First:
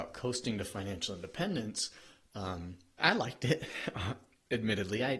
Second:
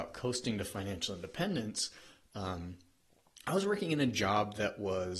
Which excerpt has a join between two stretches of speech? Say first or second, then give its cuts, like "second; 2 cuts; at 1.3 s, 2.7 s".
first; 1 cut; at 3.0 s